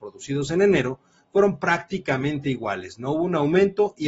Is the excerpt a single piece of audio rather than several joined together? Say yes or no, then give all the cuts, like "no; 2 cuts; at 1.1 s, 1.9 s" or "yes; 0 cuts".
yes; 0 cuts